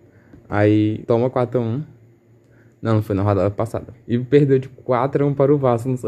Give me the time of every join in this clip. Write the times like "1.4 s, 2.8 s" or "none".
1.0 s, 3.9 s